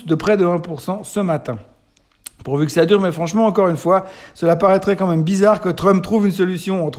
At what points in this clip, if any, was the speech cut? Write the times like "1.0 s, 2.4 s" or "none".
none

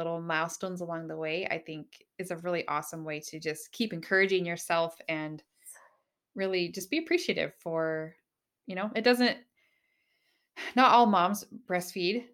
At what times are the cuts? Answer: none

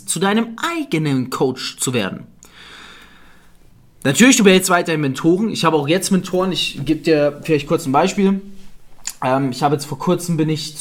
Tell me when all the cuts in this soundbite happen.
none

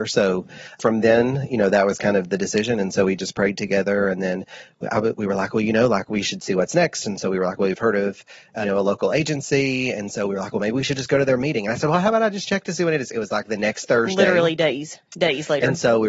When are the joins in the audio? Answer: none

